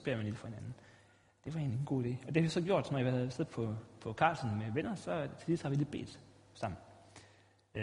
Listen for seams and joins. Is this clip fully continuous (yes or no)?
yes